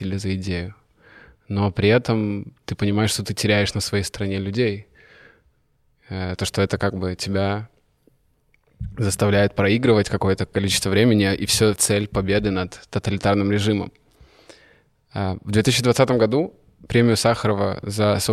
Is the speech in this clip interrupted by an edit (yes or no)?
yes